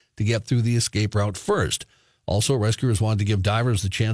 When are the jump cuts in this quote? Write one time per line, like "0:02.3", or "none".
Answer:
none